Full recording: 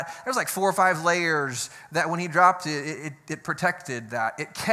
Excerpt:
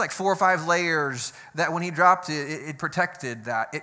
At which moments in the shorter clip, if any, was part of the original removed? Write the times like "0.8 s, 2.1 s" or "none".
2.8 s